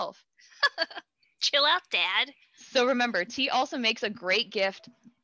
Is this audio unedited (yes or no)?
yes